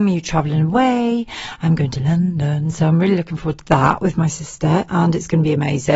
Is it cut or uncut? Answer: uncut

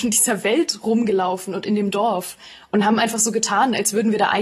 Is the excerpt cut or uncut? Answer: uncut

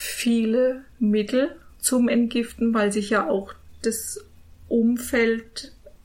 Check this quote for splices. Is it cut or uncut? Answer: uncut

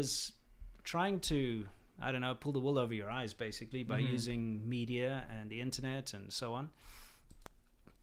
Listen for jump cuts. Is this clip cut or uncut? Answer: uncut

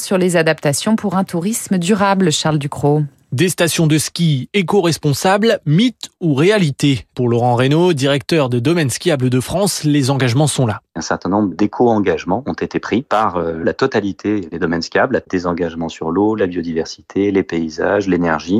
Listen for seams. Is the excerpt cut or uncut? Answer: uncut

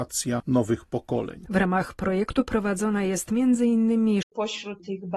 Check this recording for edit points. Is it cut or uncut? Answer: cut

